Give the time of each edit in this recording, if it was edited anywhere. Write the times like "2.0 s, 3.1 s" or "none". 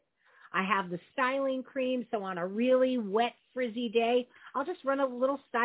none